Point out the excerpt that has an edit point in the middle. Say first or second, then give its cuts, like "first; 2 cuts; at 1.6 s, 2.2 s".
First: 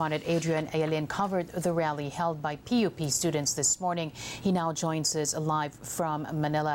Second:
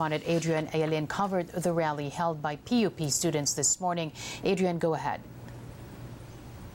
second; 1 cut; at 4.4 s